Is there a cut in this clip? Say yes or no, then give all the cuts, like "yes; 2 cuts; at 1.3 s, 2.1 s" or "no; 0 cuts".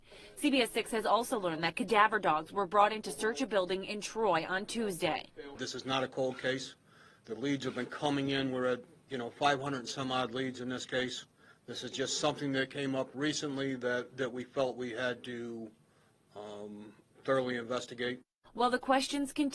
no; 0 cuts